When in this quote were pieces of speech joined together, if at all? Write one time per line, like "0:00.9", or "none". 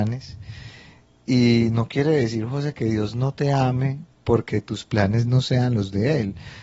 none